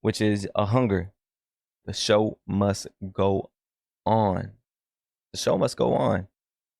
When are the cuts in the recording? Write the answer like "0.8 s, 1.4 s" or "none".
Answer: 1.8 s

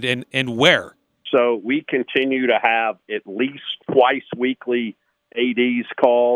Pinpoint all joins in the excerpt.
1.3 s, 3.8 s

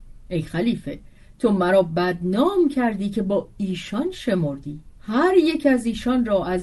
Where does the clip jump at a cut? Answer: 4.9 s

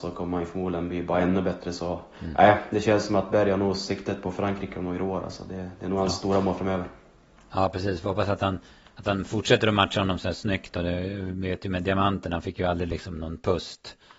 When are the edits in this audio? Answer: none

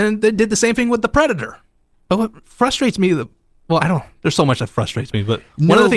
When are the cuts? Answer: none

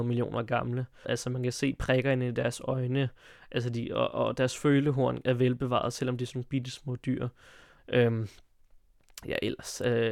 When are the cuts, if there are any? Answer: 1.0 s, 7.8 s

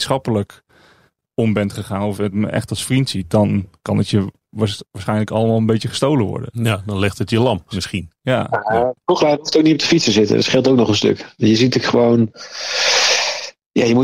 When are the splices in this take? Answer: 7.7 s

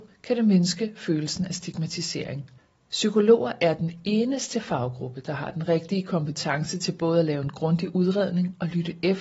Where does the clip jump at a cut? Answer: 2.7 s

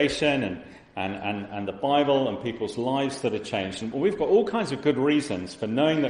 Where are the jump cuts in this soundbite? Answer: none

